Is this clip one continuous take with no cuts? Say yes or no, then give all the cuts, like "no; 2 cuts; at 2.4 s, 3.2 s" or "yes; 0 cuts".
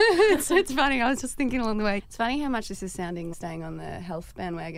no; 2 cuts; at 2.0 s, 3.3 s